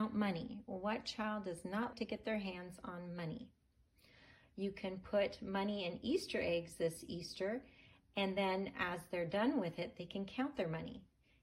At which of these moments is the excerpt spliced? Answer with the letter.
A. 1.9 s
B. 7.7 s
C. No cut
A